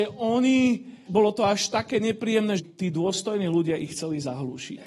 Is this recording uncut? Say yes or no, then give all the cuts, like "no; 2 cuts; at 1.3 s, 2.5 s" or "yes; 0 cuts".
no; 2 cuts; at 1.1 s, 2.6 s